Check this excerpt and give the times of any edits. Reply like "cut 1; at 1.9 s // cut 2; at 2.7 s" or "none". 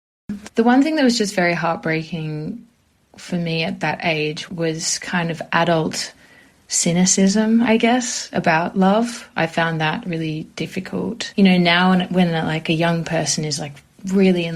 none